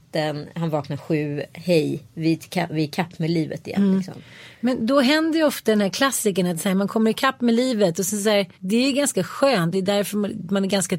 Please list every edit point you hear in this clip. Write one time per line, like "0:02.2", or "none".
0:08.5
0:09.7